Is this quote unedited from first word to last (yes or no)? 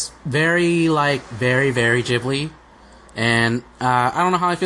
yes